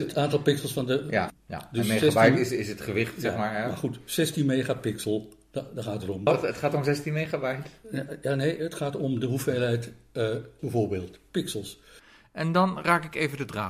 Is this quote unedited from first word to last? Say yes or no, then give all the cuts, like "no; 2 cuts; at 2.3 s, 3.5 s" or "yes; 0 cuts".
no; 3 cuts; at 1.3 s, 6.3 s, 10.6 s